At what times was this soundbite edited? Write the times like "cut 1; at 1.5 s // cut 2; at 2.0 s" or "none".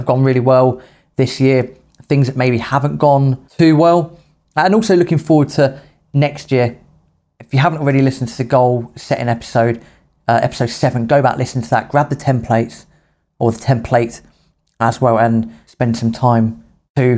cut 1; at 3.5 s